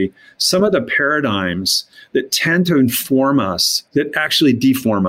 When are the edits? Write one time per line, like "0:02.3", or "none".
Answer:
0:03.9